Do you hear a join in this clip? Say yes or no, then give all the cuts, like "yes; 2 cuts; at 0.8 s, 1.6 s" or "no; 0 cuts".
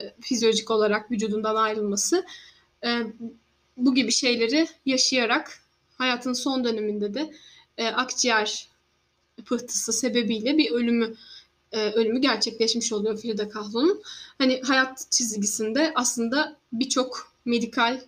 no; 0 cuts